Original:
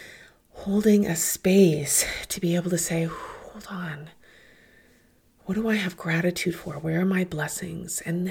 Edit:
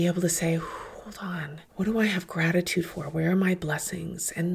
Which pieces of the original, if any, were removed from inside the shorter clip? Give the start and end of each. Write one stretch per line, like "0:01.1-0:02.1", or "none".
0:04.2-0:05.4

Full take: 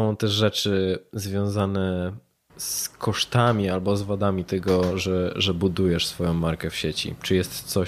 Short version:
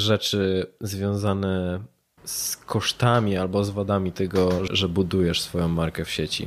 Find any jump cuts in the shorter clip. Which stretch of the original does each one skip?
0:05.0-0:05.3

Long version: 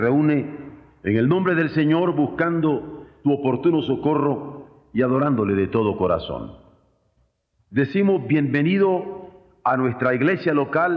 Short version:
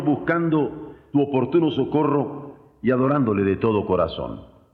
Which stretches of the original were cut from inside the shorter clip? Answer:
none

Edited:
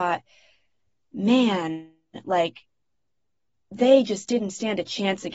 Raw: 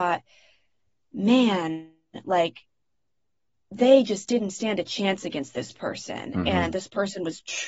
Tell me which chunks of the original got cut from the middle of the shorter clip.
none

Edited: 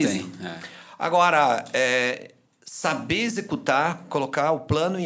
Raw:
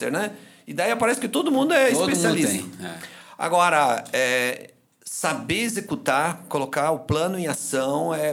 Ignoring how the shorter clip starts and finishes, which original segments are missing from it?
none

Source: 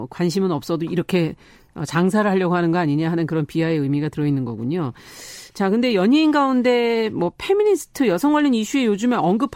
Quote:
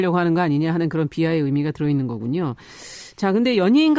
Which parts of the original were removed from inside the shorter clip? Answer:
none

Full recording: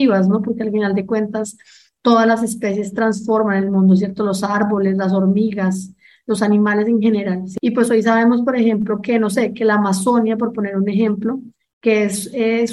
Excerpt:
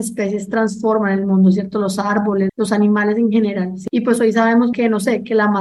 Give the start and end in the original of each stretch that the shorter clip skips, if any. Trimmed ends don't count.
0:04.9-0:06.2
0:08.4-0:09.0

